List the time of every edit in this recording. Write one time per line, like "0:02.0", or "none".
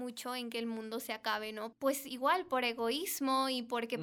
0:01.7